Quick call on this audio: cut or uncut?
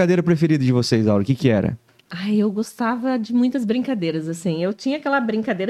uncut